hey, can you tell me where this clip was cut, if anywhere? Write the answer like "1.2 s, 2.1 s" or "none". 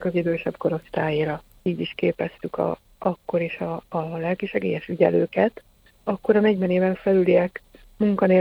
1.6 s, 5.9 s